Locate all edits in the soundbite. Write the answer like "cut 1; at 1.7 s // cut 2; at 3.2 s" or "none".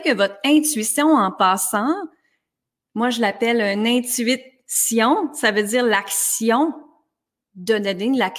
none